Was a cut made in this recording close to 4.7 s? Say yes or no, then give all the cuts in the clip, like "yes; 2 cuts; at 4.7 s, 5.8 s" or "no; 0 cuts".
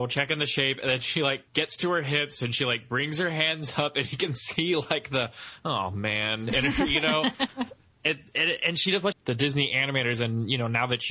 no; 2 cuts; at 1.5 s, 9.1 s